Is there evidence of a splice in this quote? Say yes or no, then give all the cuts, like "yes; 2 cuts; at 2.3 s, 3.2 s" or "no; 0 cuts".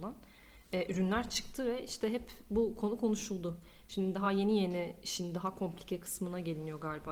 no; 0 cuts